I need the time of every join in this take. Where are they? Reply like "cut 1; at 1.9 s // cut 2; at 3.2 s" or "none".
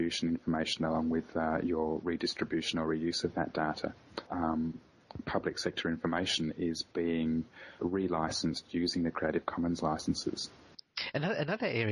cut 1; at 4.3 s // cut 2; at 7.8 s